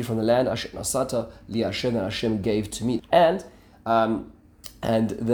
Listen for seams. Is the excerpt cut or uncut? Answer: cut